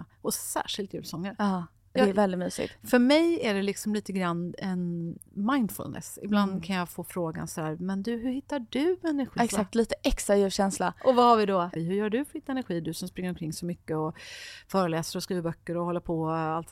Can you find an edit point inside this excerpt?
yes; 2 cuts; at 9.4 s, 11.8 s

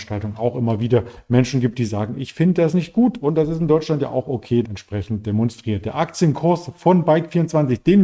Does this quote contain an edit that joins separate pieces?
yes; 1 cut; at 4.6 s

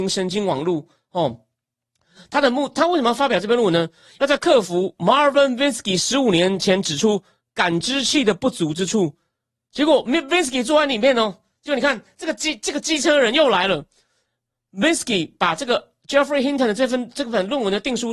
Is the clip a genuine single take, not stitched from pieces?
yes; 0 cuts

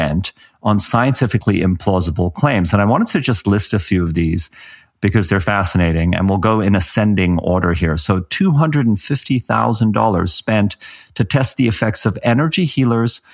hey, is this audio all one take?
yes; 0 cuts

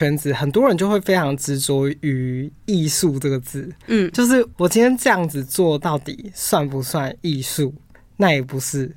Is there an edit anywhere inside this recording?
yes; 2 cuts; at 4.5 s, 7.9 s

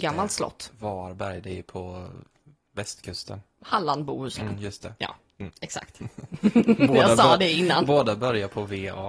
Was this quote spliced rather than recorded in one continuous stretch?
no; 0 cuts

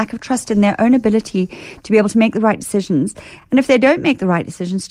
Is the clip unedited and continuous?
yes; 0 cuts

